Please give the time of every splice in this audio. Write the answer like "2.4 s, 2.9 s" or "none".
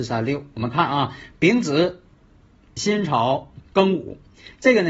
3.6 s